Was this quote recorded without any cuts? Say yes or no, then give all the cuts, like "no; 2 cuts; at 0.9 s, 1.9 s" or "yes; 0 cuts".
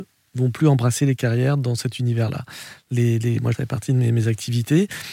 no; 1 cut; at 3.5 s